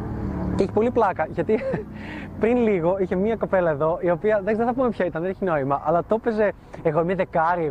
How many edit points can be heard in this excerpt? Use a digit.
0